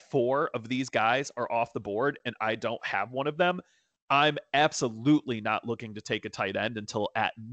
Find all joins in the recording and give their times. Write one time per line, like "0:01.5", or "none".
none